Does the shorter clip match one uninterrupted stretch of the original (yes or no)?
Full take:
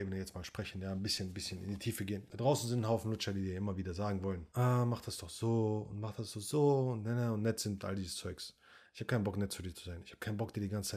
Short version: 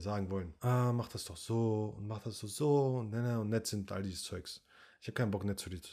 yes